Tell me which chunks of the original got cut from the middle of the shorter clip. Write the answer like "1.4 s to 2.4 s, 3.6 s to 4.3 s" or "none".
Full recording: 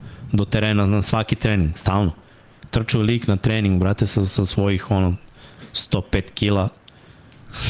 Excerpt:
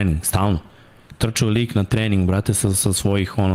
none